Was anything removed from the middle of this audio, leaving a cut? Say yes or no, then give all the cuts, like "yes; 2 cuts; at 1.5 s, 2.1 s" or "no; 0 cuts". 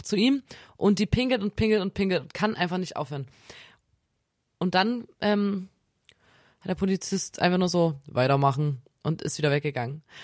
no; 0 cuts